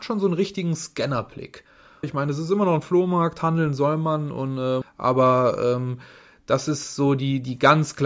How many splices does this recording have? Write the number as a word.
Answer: two